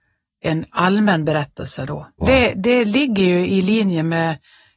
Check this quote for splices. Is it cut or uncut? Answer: cut